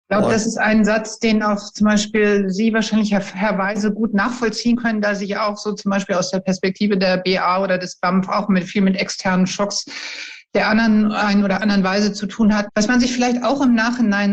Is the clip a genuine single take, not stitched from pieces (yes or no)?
no